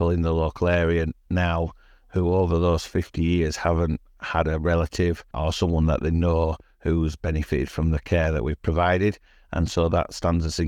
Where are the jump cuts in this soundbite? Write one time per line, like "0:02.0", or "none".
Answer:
none